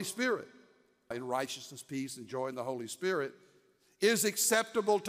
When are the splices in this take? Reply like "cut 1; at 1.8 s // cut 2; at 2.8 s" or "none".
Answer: cut 1; at 1.1 s